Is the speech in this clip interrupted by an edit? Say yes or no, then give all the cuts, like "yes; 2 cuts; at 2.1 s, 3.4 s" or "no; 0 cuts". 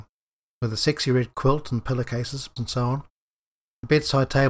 yes; 1 cut; at 2.6 s